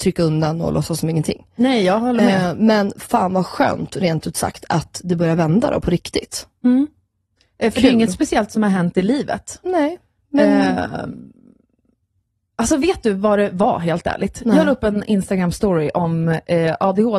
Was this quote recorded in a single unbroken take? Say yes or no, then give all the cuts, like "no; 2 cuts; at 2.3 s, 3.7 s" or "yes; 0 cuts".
yes; 0 cuts